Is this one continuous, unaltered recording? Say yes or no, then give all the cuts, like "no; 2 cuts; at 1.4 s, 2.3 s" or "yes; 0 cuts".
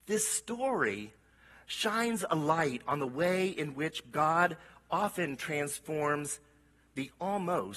yes; 0 cuts